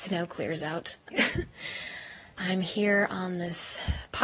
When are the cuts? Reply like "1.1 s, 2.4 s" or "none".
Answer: 1.1 s, 2.4 s